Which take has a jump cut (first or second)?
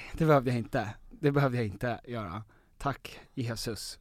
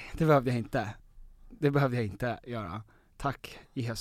first